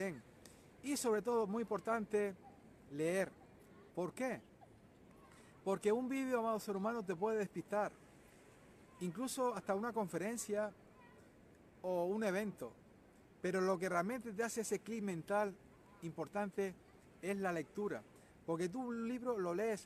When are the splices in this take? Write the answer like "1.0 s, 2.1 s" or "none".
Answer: 3.9 s